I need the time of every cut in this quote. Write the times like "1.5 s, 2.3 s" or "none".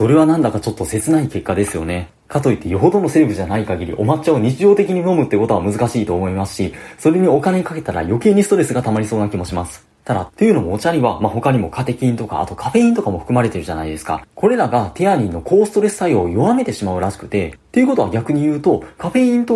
10.3 s